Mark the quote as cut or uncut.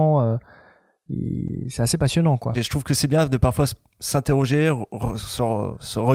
cut